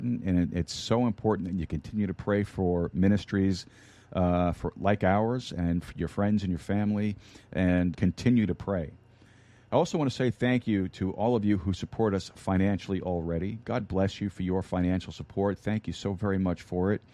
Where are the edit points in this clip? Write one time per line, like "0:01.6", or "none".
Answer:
0:07.9